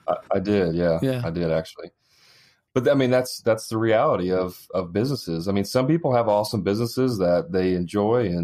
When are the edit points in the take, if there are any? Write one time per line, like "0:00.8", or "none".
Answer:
none